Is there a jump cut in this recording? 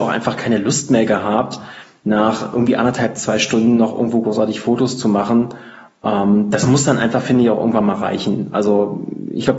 no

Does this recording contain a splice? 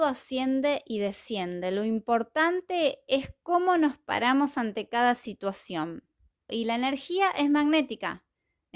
yes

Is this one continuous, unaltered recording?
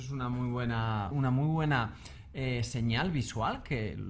no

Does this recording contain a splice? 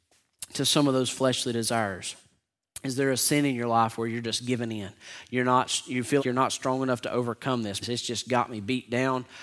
yes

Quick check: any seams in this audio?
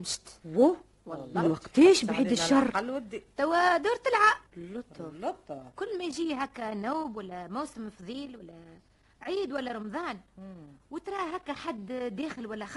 yes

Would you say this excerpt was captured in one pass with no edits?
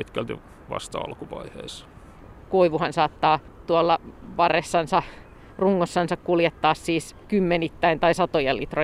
yes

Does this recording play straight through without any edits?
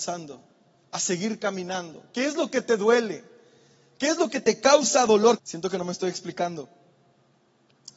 no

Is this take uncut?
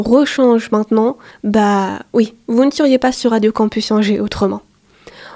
no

